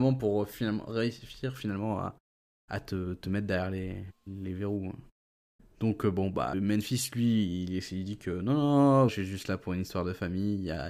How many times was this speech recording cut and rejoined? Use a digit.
2